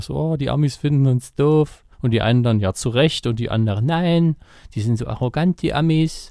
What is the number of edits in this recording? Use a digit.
1